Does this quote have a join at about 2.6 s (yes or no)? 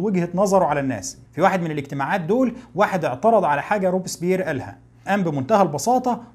no